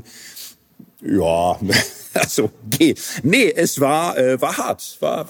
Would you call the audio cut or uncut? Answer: uncut